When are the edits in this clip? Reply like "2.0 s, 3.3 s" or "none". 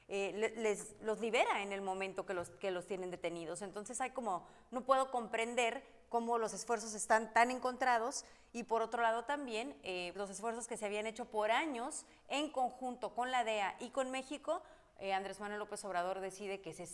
10.1 s